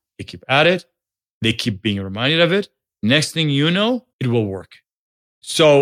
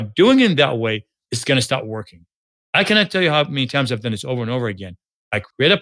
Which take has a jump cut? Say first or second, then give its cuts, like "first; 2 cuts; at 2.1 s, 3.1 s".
first; 1 cut; at 4.1 s